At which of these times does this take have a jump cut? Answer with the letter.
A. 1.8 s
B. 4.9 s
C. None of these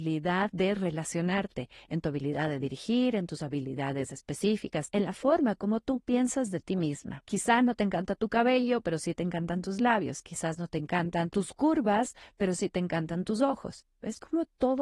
B